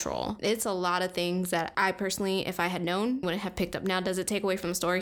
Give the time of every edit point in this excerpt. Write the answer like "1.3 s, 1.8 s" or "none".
3.2 s